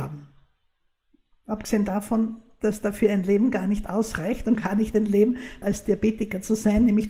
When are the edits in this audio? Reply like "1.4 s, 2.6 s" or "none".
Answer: 4.6 s, 5.6 s